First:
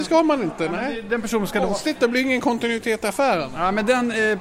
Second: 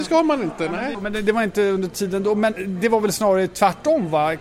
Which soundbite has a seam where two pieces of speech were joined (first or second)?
second